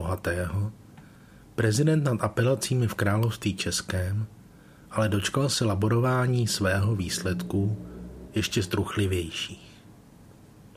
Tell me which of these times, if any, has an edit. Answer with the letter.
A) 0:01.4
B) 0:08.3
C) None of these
B